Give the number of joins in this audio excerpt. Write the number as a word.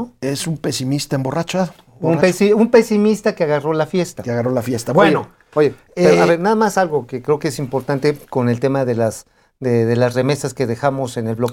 zero